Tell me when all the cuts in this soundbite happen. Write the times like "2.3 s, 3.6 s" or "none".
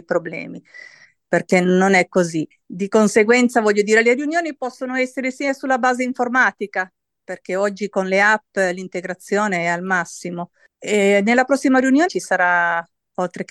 2.5 s, 12.1 s